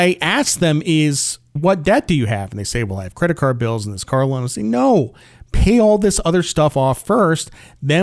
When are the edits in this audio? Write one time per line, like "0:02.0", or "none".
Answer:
0:01.6